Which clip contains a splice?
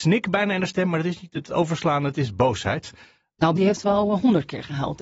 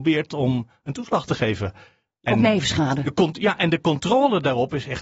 first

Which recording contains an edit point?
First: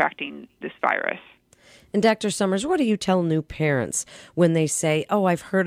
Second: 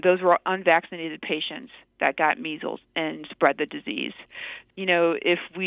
second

